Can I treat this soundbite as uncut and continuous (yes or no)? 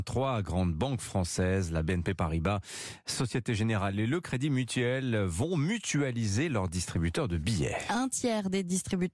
yes